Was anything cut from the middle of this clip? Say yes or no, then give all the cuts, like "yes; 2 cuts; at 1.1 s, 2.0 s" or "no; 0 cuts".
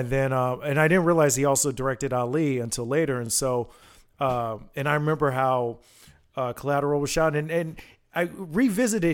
no; 0 cuts